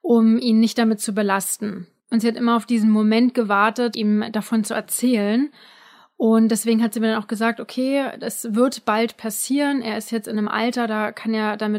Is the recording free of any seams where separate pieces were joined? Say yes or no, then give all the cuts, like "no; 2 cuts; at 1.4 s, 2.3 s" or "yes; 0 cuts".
no; 1 cut; at 3.9 s